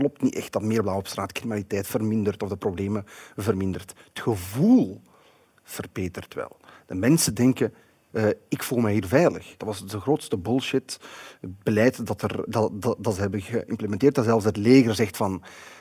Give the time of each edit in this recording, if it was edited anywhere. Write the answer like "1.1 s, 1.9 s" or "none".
8.1 s, 9.6 s, 12.5 s